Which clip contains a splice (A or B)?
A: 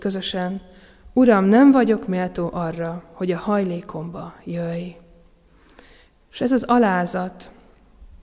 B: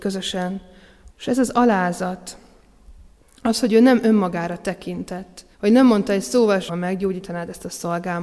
B